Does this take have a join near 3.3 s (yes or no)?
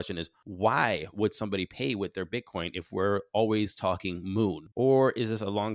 no